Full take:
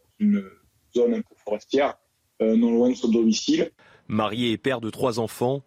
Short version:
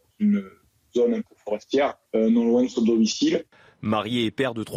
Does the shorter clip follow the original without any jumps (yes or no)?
no